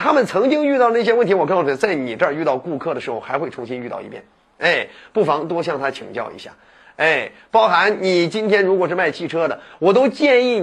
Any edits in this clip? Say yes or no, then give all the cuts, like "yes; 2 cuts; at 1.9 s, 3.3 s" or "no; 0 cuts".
no; 0 cuts